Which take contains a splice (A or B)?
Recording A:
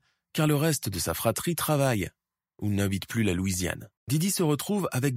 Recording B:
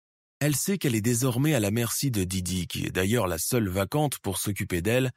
A